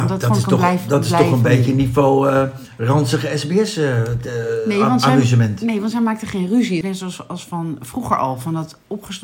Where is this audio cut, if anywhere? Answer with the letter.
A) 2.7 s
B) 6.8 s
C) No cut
B